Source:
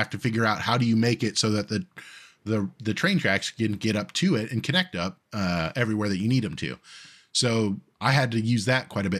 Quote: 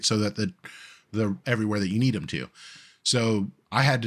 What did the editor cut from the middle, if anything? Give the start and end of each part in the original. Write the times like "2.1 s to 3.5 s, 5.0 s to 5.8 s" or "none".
2.8 s to 5.7 s